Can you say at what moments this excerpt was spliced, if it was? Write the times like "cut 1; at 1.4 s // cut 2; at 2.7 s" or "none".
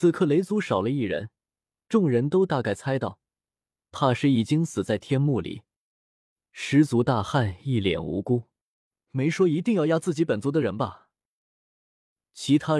cut 1; at 6.5 s

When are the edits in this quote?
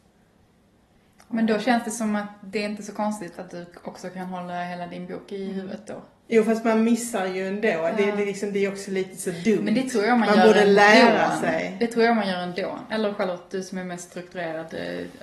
none

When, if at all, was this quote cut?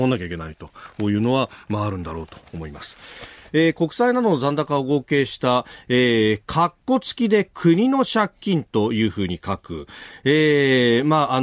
cut 1; at 3.5 s

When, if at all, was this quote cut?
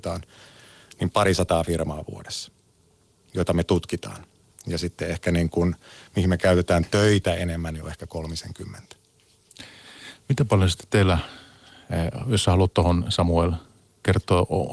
none

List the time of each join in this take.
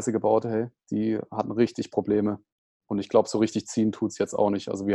none

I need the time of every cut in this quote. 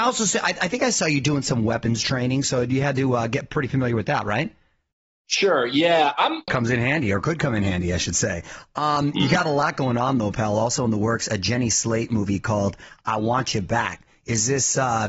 cut 1; at 6.5 s

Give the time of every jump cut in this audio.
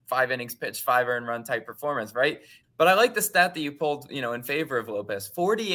cut 1; at 2.6 s

